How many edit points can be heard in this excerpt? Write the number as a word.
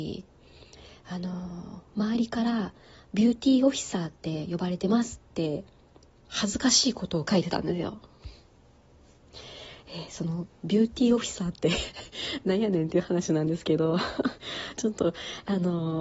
zero